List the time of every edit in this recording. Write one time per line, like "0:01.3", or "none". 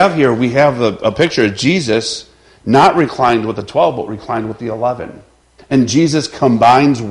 0:05.6